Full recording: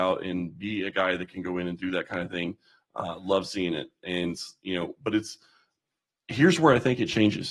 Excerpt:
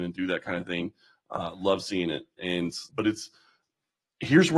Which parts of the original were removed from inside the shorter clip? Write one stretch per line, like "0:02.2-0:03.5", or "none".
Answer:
0:04.5-0:05.0